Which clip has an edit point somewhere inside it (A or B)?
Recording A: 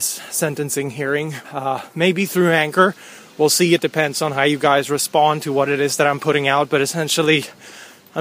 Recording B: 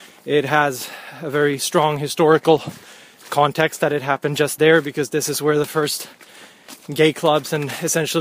A